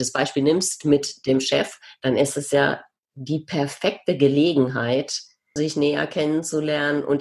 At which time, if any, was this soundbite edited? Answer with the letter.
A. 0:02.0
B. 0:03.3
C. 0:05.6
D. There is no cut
C